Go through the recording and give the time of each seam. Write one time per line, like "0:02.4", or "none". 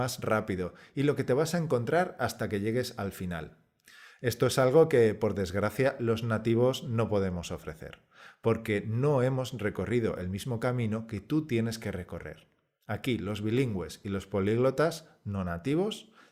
none